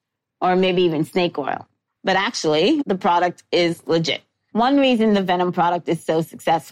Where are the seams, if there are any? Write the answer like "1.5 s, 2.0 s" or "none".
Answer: 2.8 s